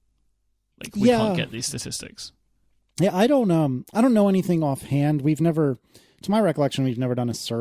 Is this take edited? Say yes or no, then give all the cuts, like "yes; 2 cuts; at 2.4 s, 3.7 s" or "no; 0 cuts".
no; 0 cuts